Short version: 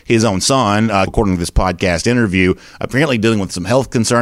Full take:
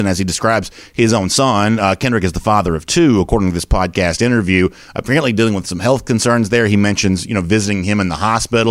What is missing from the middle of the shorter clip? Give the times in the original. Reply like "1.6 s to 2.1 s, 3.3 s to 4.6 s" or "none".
2.0 s to 3.2 s